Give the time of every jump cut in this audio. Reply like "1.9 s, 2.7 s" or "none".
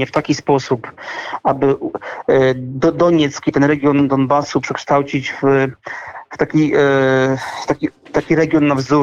none

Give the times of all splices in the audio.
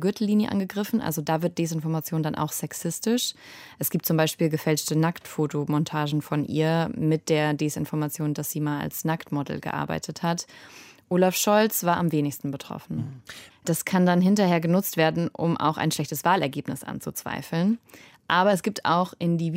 13.5 s

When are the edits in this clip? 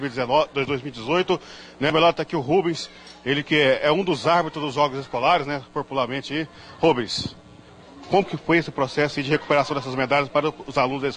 none

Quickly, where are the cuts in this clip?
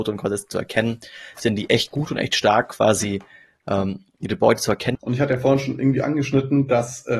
4.9 s

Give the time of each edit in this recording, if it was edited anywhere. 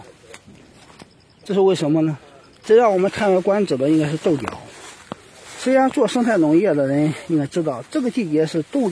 2.6 s

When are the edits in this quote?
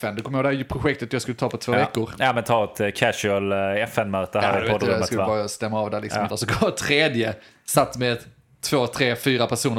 6.3 s

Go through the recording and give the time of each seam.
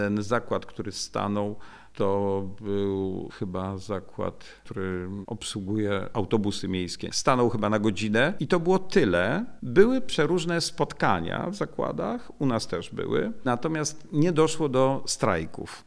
none

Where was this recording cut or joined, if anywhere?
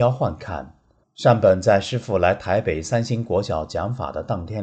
1.0 s

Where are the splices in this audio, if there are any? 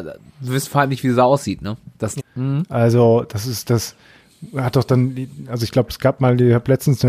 2.2 s

